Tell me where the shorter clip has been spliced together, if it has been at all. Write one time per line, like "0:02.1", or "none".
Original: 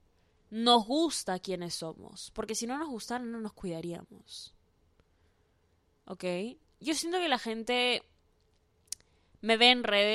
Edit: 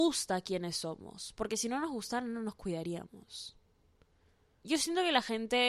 0:04.6